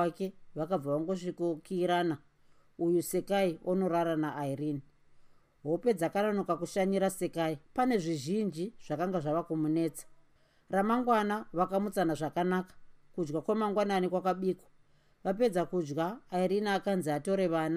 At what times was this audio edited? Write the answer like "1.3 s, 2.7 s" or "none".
7.6 s